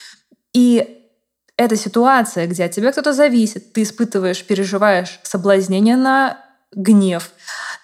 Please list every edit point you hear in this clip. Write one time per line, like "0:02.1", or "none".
none